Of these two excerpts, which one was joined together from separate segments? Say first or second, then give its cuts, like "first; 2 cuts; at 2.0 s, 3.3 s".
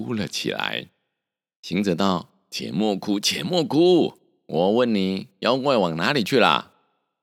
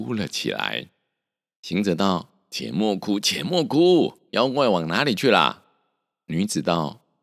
second; 1 cut; at 4.3 s